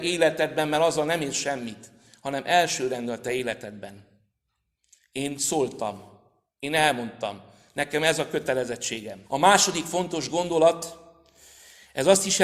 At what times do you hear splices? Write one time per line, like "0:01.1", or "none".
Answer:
0:09.3